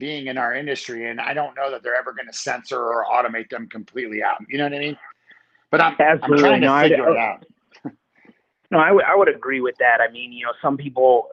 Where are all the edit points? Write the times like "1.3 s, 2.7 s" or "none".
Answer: none